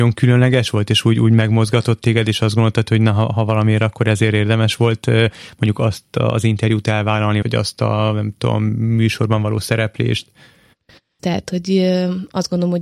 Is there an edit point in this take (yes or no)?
yes